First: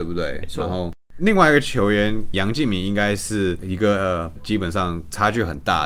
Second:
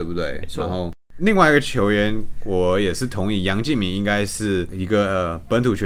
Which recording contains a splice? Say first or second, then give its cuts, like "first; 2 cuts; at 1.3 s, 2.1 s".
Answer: first; 2 cuts; at 2.3 s, 4.4 s